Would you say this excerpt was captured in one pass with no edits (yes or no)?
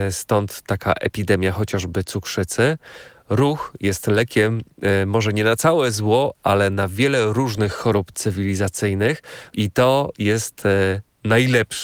no